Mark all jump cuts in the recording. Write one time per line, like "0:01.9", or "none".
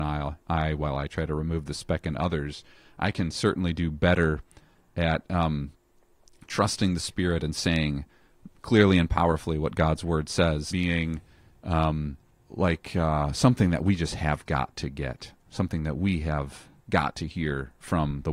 0:10.7